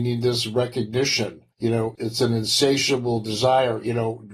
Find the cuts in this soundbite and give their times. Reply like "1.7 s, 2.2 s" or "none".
1.9 s